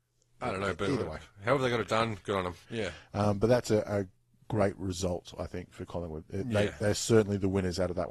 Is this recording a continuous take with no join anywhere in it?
no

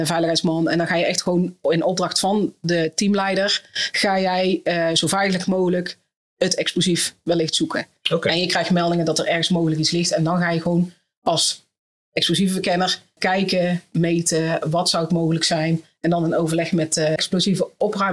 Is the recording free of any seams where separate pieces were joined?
no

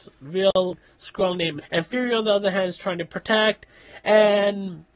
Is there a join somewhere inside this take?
yes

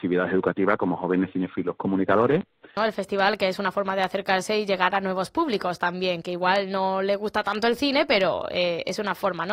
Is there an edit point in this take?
yes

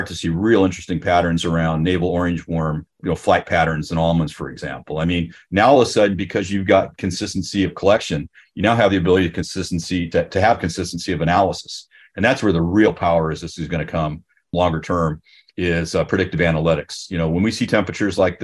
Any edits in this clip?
no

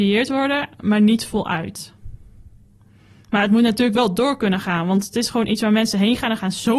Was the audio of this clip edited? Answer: no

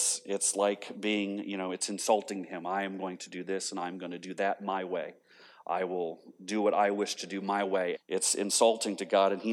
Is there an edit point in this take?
yes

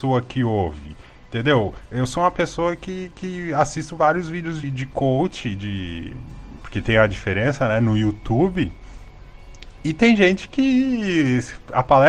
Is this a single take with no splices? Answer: no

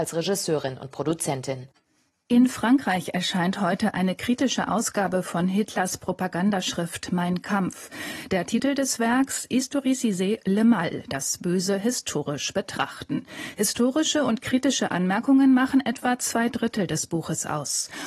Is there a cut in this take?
no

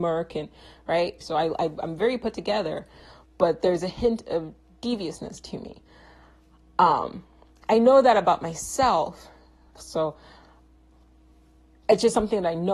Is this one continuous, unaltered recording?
no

